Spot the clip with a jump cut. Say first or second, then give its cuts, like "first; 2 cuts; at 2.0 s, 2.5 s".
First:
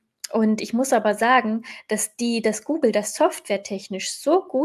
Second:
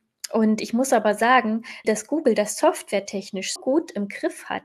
second; 2 cuts; at 1.8 s, 3.6 s